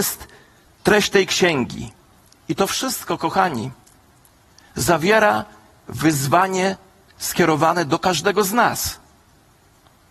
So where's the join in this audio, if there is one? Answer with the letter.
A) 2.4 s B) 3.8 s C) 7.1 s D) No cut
D